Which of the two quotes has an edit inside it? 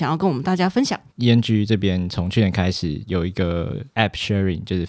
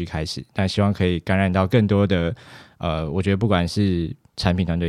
first; 1 cut; at 1.1 s

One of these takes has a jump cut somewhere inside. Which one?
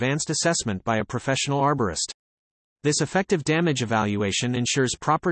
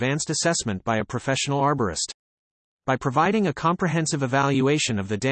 second; 1 cut; at 2.7 s

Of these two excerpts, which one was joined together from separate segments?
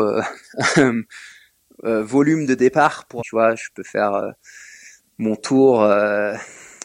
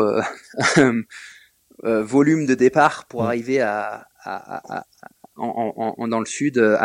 first; 1 cut; at 3.2 s

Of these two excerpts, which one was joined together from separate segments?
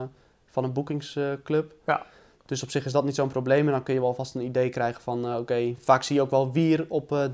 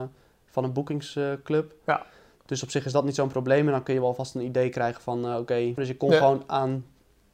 second; 1 cut; at 5.8 s

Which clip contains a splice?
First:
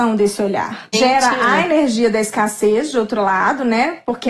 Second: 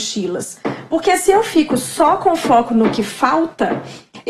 first; 1 cut; at 0.9 s

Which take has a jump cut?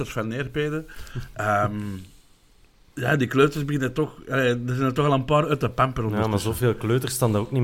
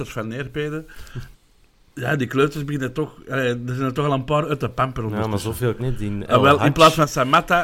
second; 2 cuts; at 1.3 s, 5.8 s

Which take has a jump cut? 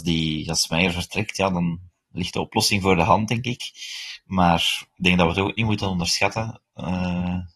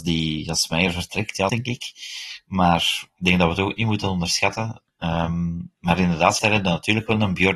second; 3 cuts; at 1.5 s, 4.9 s, 6.4 s

